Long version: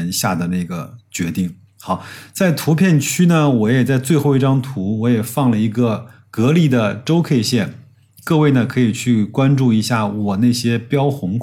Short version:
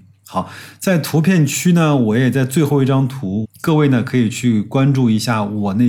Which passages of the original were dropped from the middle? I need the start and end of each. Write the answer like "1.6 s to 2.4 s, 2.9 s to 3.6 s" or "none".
5.0 s to 8.1 s